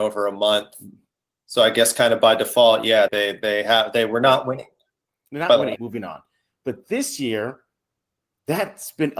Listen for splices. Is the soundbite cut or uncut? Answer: cut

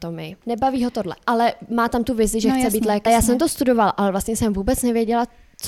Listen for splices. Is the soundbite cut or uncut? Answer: cut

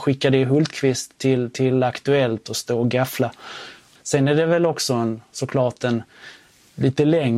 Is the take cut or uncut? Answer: cut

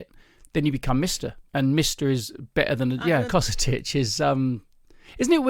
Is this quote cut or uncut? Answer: cut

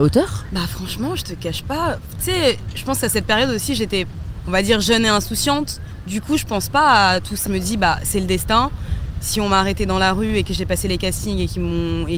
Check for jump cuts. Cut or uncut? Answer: cut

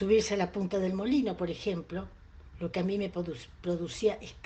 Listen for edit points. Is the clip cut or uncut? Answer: uncut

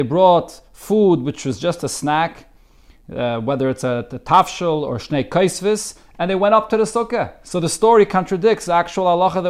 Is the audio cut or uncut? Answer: uncut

